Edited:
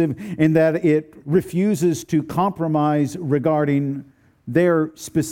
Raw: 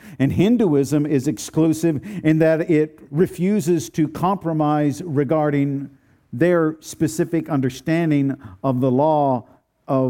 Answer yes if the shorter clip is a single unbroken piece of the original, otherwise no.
yes